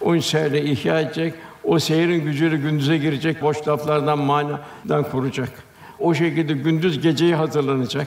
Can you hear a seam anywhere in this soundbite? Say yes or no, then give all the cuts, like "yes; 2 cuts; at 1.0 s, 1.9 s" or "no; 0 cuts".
yes; 1 cut; at 3.4 s